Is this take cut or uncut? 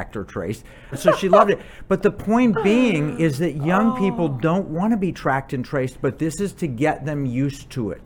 cut